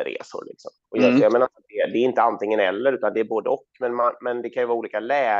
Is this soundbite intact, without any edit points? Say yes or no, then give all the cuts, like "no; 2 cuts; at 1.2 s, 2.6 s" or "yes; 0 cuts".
yes; 0 cuts